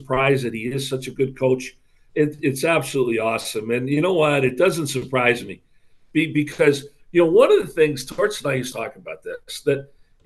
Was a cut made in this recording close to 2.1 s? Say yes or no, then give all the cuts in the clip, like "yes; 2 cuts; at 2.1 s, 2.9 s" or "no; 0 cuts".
yes; 2 cuts; at 2.1 s, 8.7 s